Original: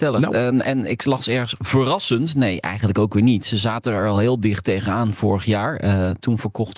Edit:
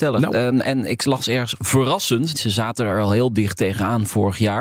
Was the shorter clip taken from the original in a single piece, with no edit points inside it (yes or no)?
no